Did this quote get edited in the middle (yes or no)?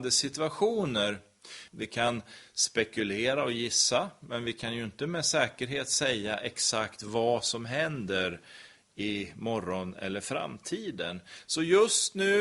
yes